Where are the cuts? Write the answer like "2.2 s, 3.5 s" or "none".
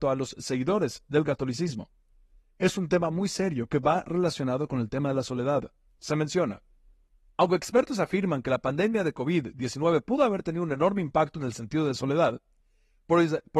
6.0 s